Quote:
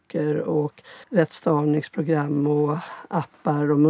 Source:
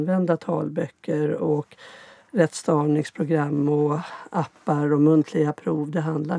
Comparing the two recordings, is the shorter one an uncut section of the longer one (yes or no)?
no